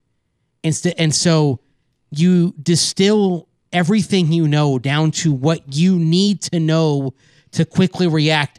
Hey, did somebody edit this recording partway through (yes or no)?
no